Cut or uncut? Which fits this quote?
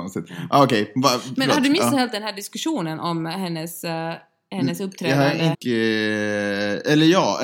cut